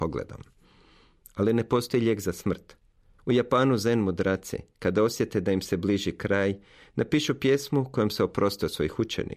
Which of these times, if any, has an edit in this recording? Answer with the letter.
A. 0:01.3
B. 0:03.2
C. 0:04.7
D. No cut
B